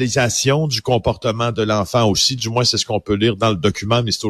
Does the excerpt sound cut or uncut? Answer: uncut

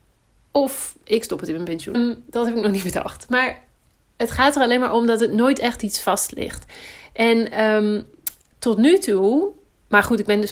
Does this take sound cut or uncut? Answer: cut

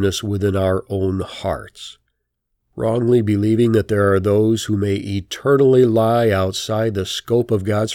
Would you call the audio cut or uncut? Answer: uncut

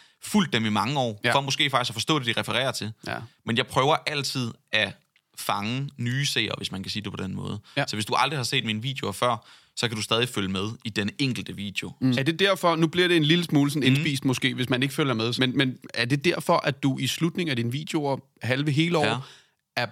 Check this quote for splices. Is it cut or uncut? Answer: cut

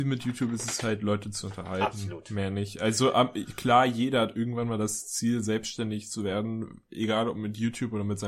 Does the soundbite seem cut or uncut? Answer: uncut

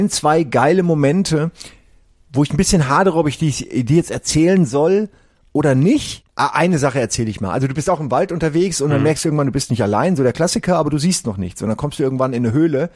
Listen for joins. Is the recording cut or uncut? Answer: cut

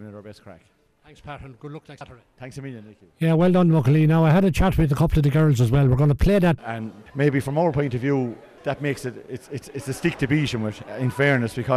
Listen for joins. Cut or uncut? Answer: cut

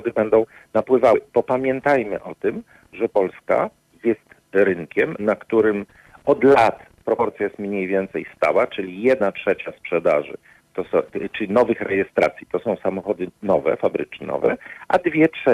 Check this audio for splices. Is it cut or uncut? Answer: uncut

